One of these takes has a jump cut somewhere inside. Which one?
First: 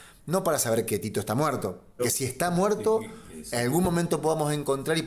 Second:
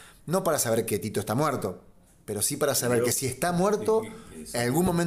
first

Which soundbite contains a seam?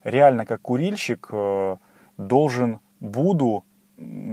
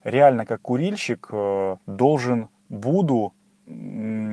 second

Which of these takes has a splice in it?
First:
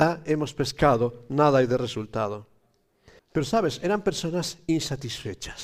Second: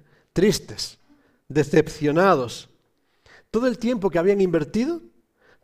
first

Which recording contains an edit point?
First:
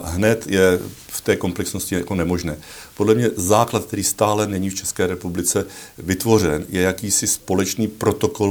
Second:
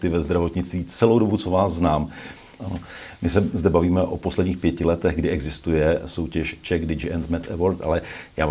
second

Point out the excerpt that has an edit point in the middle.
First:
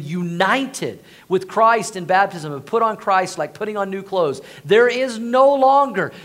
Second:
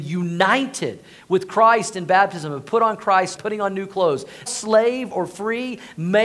second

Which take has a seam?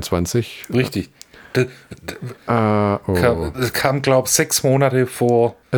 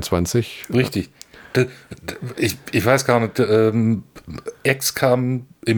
first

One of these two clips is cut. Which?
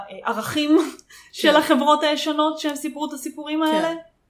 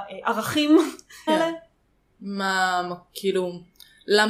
second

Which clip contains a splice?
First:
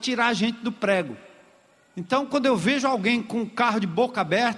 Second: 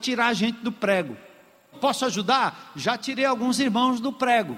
second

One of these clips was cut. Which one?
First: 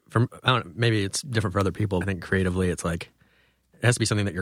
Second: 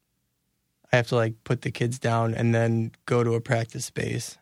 first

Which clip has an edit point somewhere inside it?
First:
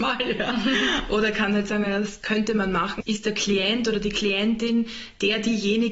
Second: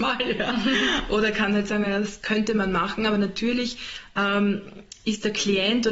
first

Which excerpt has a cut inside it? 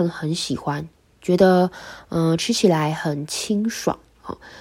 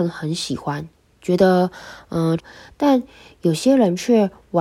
second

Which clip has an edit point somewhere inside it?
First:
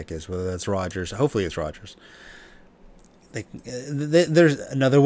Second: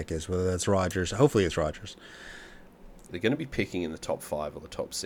second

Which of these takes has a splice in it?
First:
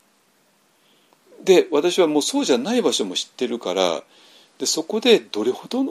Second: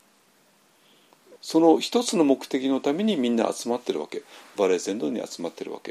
second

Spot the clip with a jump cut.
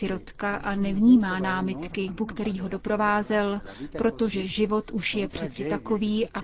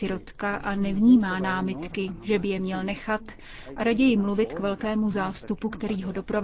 first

